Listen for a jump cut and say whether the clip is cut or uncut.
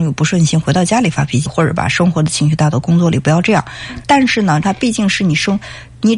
cut